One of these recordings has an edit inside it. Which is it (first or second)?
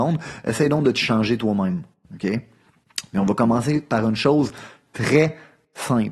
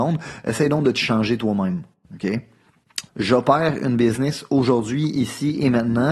second